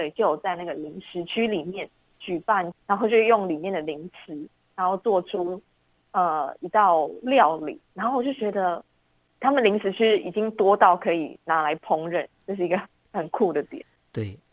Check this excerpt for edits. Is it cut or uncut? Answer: cut